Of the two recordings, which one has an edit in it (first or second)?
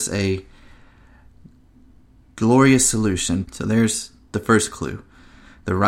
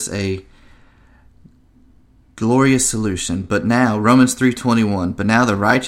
first